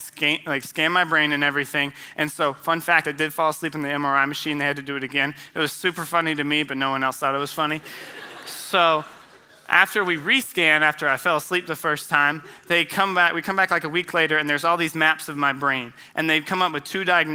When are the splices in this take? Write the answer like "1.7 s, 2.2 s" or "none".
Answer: none